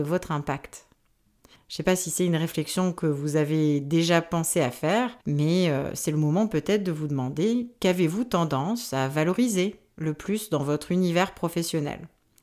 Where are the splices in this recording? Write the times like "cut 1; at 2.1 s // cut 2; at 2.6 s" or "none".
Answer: cut 1; at 1.6 s // cut 2; at 5.2 s

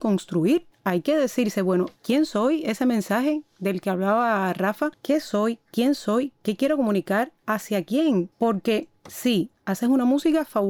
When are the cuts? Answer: cut 1; at 8.3 s

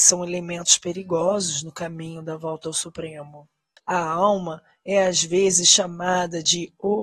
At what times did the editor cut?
cut 1; at 3.8 s

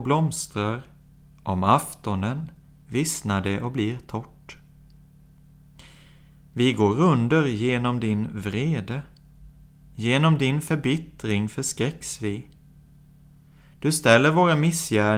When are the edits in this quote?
none

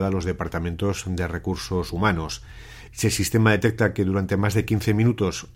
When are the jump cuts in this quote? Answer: cut 1; at 2.9 s

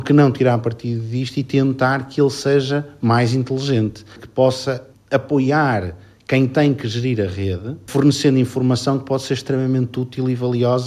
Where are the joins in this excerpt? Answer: none

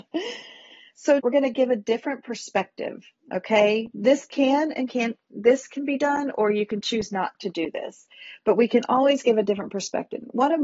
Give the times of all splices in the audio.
cut 1; at 1.2 s

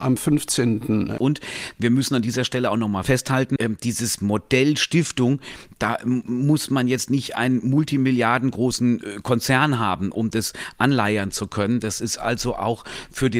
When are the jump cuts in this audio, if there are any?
cut 1; at 1.2 s

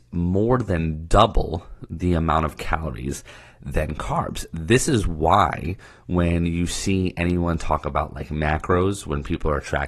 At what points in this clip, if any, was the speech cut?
none

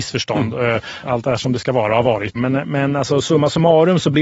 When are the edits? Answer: cut 1; at 1.0 s // cut 2; at 2.4 s

